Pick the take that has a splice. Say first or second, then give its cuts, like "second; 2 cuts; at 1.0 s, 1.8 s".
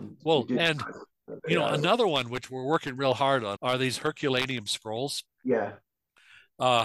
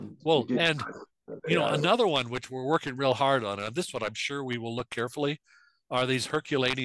first; 2 cuts; at 3.6 s, 5.3 s